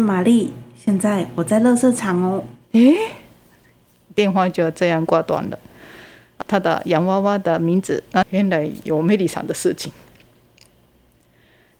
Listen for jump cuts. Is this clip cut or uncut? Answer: cut